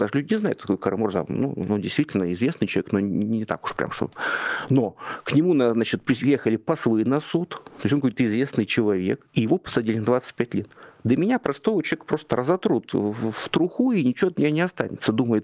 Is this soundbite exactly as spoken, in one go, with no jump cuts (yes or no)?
yes